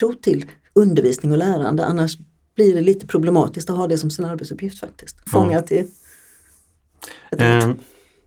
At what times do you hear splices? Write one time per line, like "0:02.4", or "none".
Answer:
0:05.3

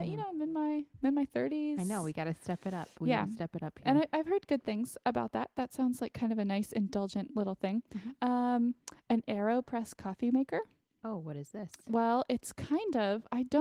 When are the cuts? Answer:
none

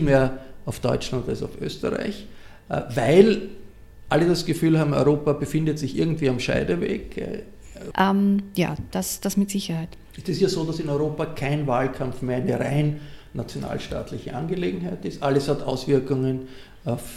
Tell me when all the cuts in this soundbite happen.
0:07.9

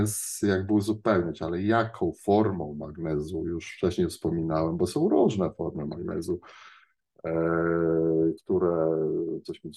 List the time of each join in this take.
0:08.4

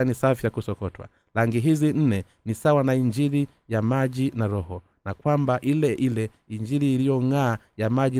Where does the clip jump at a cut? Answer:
none

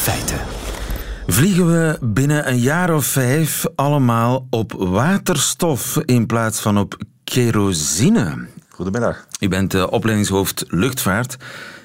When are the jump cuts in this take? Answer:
0:08.6

